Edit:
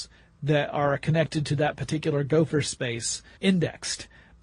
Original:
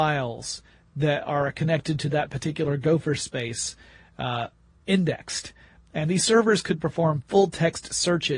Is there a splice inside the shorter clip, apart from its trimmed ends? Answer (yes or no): yes